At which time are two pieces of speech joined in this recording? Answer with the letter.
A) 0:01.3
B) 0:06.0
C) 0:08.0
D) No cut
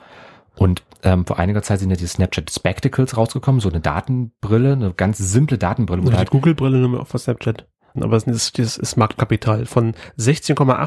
C